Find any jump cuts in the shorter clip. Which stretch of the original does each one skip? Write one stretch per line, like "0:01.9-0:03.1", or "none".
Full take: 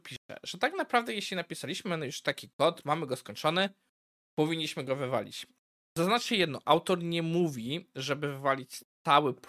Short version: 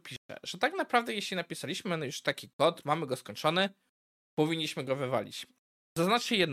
none